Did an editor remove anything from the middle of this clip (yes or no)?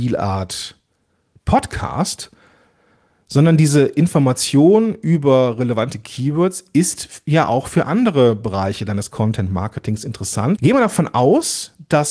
yes